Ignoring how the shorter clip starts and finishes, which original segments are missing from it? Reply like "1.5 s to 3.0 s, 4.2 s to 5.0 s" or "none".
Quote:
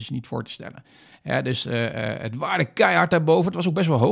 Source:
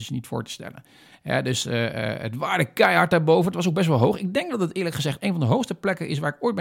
none